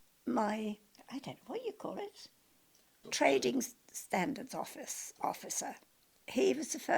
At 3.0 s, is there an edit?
yes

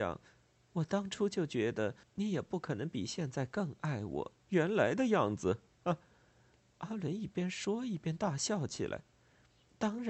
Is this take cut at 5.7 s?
no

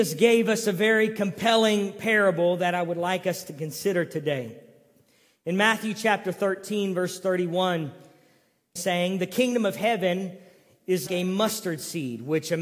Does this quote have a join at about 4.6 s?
no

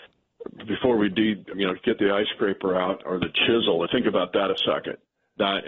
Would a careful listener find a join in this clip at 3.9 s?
yes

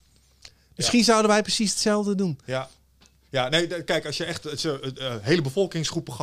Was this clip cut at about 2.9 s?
no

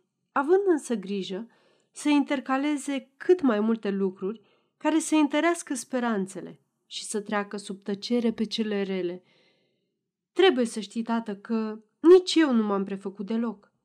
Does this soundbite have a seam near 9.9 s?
no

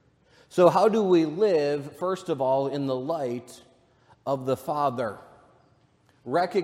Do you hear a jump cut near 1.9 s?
no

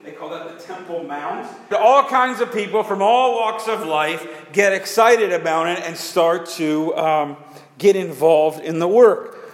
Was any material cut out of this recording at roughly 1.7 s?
yes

